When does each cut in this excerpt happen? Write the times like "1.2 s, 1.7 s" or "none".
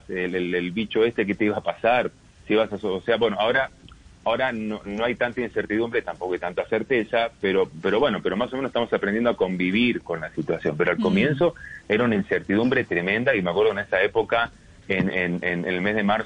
none